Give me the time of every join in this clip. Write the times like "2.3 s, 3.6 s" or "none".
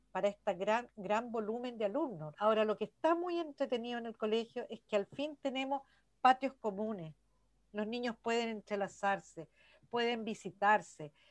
2.3 s